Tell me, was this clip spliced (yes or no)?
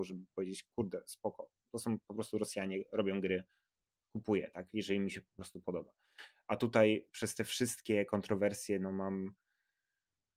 no